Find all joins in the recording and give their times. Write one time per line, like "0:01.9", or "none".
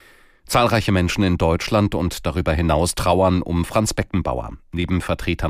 none